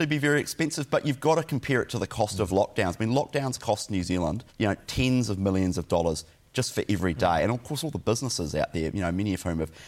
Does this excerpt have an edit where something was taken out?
yes; 1 cut; at 4.5 s

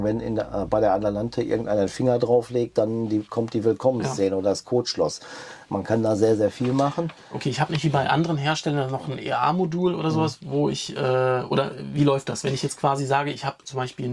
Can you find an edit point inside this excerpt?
no; 0 cuts

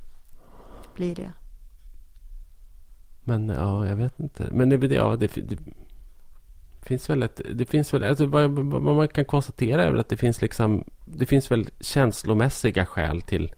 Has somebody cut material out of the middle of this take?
no; 0 cuts

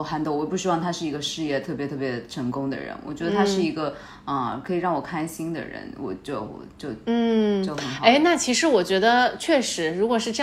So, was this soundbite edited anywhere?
no; 0 cuts

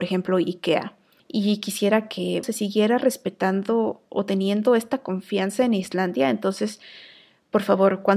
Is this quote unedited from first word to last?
no; 2 cuts; at 1.2 s, 2.4 s

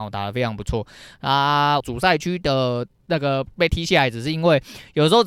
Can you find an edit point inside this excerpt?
yes; 1 cut; at 1.8 s

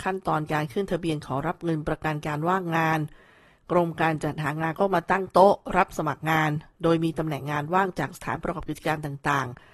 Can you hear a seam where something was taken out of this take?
no; 0 cuts

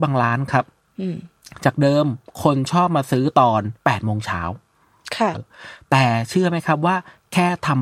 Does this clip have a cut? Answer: yes; 2 cuts; at 3.8 s, 5.3 s

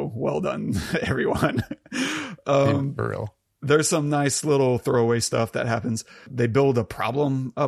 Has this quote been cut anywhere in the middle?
no; 0 cuts

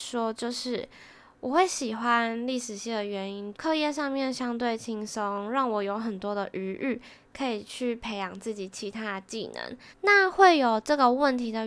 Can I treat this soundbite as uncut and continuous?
no; 2 cuts; at 3.5 s, 9.9 s

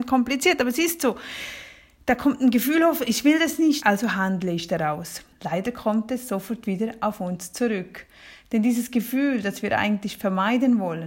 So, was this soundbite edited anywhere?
yes; 2 cuts; at 3.8 s, 5.3 s

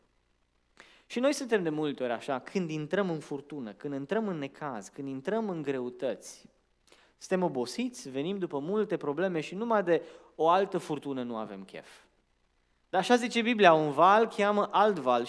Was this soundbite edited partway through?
no; 0 cuts

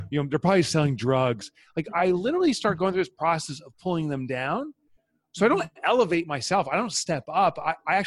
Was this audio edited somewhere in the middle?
no; 0 cuts

